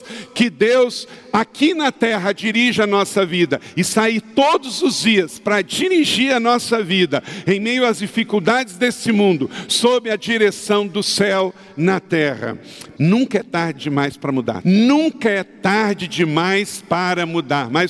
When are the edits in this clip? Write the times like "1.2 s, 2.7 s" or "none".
13.0 s, 14.6 s